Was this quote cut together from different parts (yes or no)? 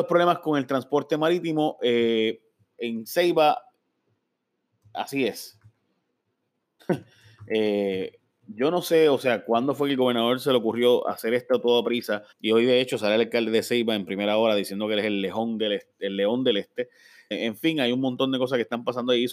yes